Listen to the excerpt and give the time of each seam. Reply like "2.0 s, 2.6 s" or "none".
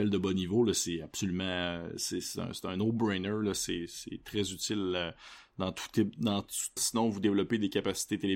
6.8 s